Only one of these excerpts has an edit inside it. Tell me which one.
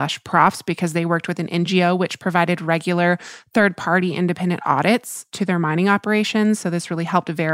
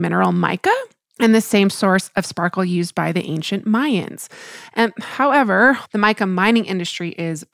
second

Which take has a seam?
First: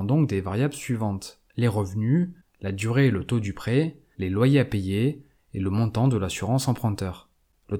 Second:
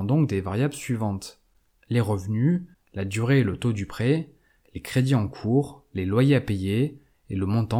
first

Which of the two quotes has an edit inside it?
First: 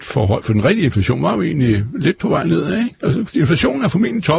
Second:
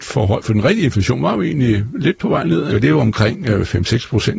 second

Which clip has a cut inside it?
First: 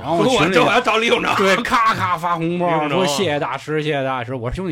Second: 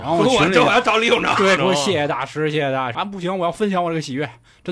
second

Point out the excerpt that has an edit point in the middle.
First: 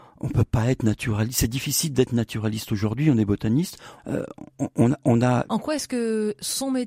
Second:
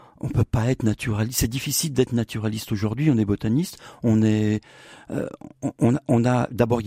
first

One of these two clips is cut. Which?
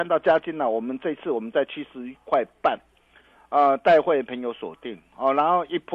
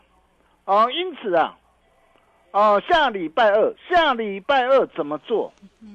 second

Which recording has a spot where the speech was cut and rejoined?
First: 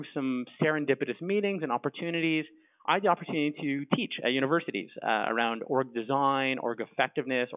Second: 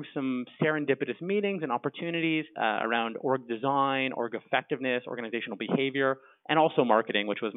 second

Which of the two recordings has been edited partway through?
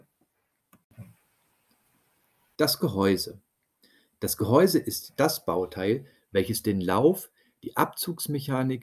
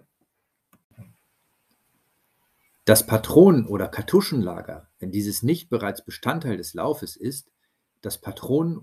first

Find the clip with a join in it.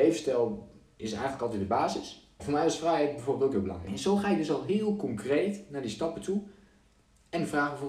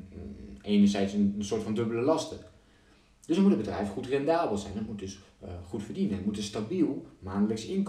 first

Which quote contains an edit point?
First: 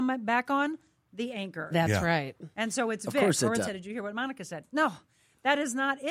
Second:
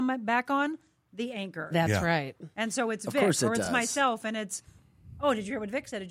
first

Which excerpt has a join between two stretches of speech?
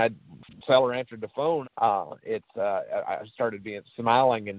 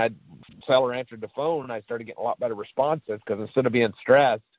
first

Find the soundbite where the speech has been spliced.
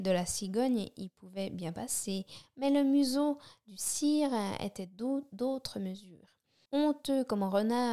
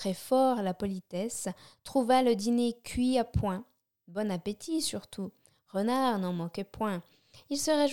first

